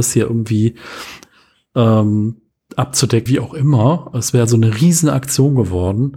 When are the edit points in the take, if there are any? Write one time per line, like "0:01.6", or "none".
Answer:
0:03.3